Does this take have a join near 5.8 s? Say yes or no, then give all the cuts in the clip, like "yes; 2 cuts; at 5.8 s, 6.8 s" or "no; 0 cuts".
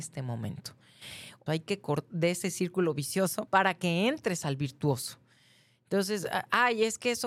no; 2 cuts; at 1.5 s, 3.5 s